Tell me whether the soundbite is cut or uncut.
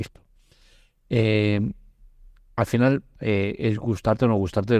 cut